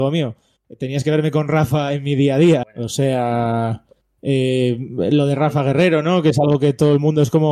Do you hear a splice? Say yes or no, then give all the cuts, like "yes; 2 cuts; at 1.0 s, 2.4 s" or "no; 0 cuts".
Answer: yes; 1 cut; at 2.6 s